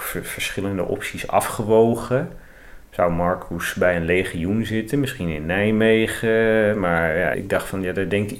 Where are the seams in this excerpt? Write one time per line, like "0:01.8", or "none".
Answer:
0:07.3